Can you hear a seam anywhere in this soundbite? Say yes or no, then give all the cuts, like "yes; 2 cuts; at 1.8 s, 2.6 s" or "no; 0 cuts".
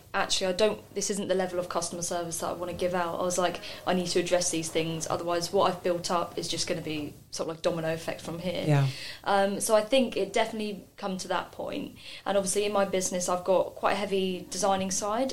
no; 0 cuts